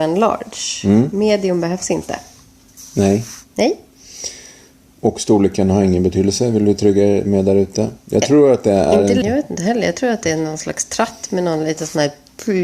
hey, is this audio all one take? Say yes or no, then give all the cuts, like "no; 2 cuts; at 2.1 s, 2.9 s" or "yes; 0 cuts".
no; 1 cut; at 9.2 s